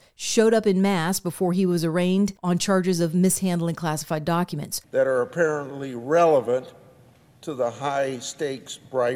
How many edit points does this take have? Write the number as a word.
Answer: one